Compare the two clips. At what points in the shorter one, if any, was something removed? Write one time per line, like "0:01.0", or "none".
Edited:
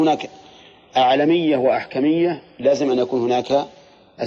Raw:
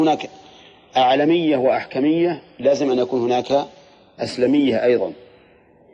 none